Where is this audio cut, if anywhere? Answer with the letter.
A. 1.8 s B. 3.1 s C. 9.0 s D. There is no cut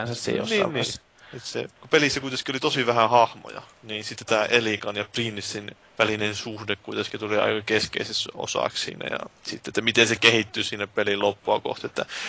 A